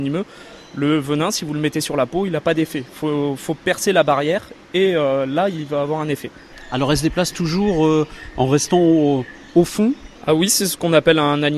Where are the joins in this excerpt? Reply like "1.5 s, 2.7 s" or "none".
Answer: none